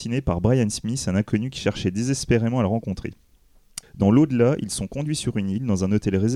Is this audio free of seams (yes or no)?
no